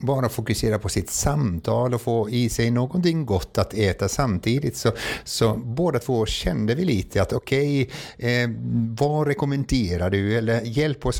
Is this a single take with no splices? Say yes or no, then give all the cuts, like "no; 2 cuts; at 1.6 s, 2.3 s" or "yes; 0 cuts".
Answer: yes; 0 cuts